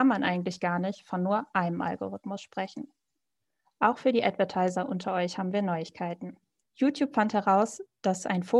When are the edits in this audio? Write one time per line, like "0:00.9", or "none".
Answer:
0:06.6

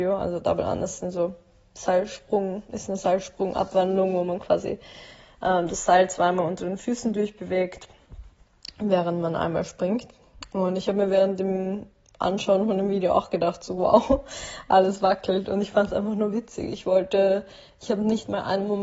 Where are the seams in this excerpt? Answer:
none

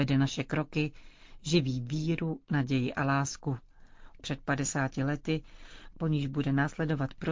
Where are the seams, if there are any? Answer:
0:04.2
0:05.9

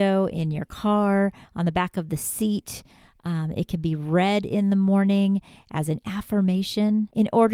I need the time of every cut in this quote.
none

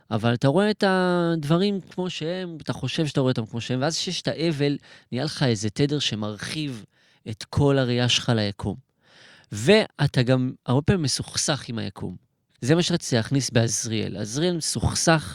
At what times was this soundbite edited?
none

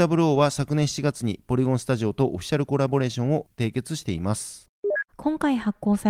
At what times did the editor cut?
0:05.1

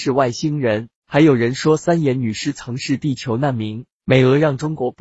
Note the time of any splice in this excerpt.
0:03.9

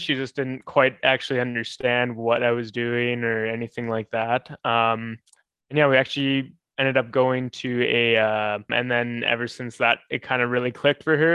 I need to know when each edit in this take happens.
0:08.7

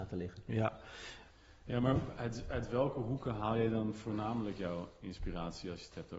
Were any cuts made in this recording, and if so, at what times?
none

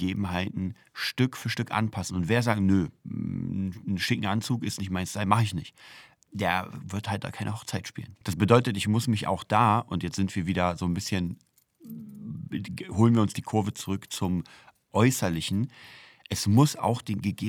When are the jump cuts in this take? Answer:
0:08.2

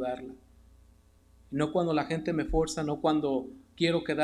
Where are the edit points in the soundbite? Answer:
none

